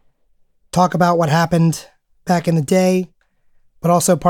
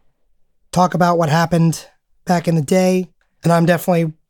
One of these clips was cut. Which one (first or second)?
second